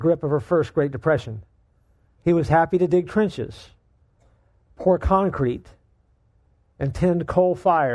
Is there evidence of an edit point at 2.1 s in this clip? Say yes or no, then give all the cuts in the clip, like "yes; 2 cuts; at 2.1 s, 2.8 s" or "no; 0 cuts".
yes; 1 cut; at 2.1 s